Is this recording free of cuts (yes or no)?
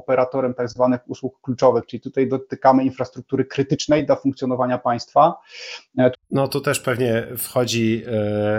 no